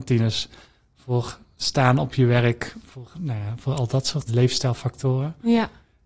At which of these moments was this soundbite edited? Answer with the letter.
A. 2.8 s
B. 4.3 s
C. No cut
B